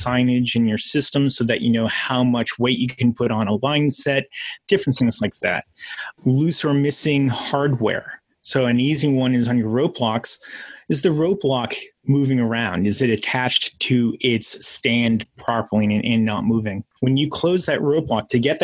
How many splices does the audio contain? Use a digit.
2